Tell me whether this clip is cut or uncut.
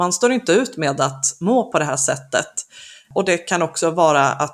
uncut